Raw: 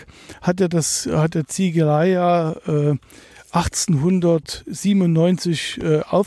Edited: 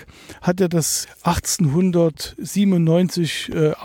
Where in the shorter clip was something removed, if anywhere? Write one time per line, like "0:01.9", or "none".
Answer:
0:01.0